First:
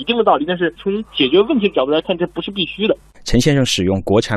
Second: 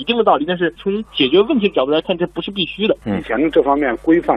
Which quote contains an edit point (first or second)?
second